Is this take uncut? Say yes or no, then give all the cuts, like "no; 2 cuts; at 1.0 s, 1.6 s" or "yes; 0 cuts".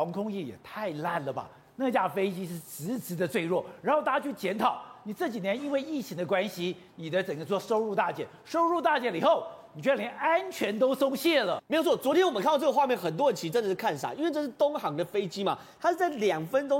yes; 0 cuts